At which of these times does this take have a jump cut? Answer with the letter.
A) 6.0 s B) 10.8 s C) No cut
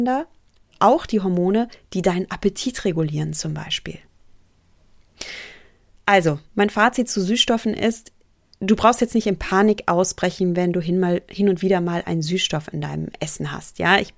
C